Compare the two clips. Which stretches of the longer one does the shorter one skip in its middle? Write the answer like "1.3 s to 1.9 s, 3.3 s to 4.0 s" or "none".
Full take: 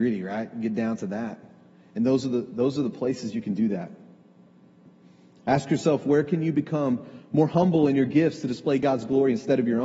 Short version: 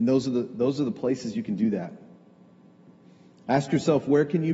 none

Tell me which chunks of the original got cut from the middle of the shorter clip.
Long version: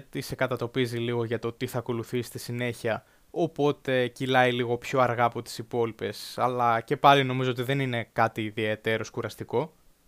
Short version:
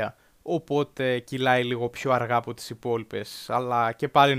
none

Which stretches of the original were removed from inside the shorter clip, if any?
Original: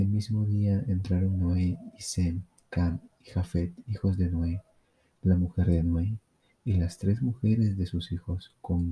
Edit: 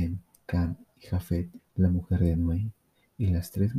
3.8 s to 5.1 s

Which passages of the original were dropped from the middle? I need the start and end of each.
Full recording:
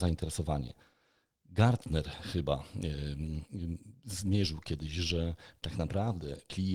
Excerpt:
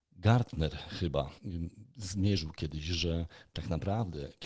2.7 s to 3.5 s

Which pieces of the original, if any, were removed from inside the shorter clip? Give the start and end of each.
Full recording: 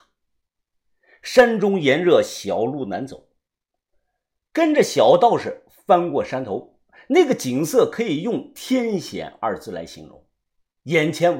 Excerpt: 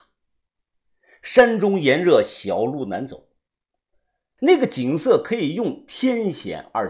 4.4 s to 7.1 s

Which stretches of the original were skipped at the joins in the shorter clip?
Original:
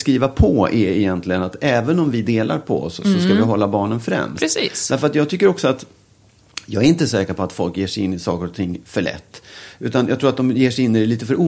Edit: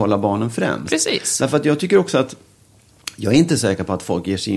none

